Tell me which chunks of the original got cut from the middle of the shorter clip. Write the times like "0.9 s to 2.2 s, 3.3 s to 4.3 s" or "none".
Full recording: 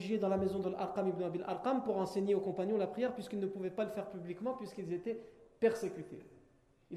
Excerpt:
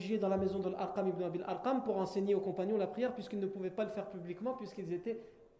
none